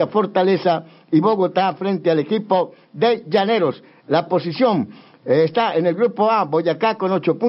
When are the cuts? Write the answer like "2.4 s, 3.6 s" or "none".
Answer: none